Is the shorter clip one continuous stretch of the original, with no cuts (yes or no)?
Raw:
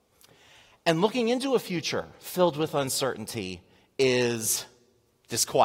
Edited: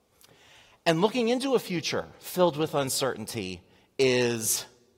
yes